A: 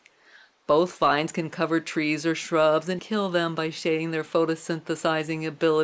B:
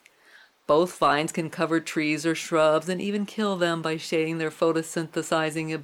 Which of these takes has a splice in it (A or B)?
A